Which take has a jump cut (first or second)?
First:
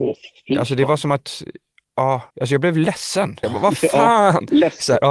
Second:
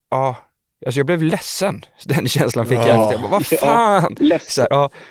first